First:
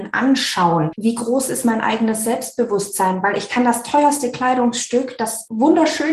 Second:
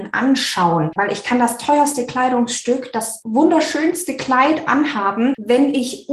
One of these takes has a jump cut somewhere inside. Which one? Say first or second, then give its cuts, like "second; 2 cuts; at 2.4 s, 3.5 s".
second; 1 cut; at 1.0 s